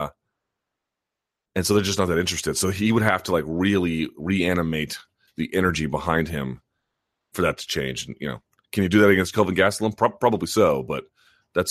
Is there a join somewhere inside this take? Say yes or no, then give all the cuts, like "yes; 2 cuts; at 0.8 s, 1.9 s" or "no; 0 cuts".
no; 0 cuts